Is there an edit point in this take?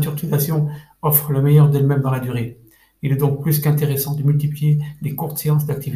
no; 0 cuts

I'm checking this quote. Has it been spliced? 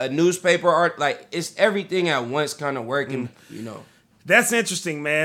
yes; 1 cut; at 3.2 s

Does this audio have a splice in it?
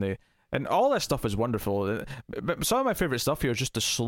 no; 0 cuts

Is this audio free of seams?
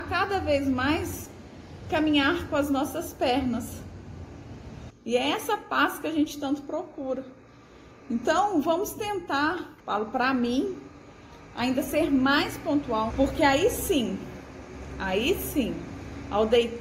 no; 3 cuts; at 4.9 s, 9.8 s, 13.1 s

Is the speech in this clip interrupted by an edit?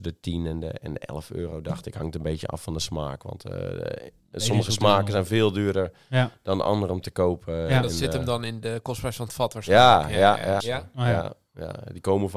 yes; 1 cut; at 10.6 s

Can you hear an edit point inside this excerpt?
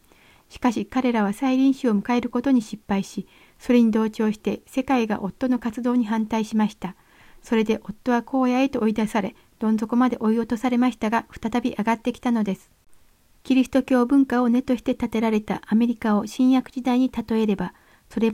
no; 0 cuts

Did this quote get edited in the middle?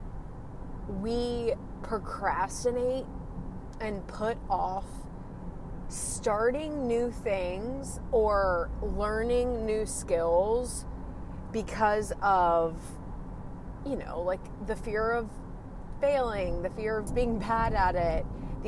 yes; 1 cut; at 17.1 s

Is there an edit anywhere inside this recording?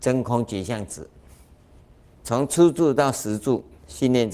yes; 1 cut; at 2.2 s

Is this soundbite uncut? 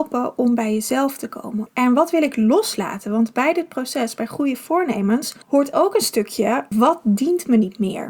no; 3 cuts; at 1.7 s, 5.4 s, 6.7 s

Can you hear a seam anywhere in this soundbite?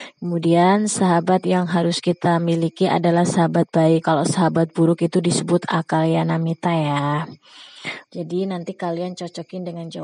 yes; 2 cuts; at 4.0 s, 8.1 s

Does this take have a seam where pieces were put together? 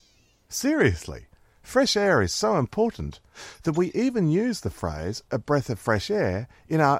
no; 0 cuts

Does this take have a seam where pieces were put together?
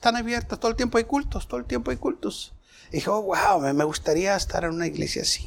no; 0 cuts

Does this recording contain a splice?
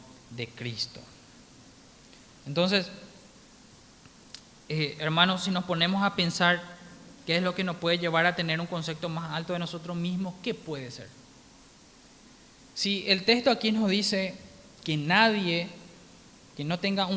no; 0 cuts

